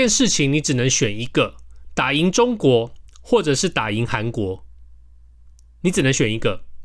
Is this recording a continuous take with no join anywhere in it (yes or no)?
yes